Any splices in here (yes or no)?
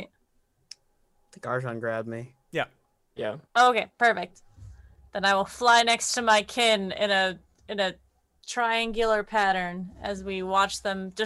yes